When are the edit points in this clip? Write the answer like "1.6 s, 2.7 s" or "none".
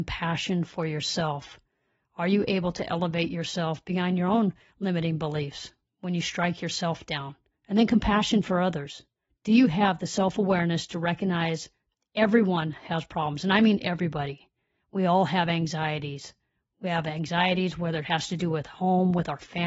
none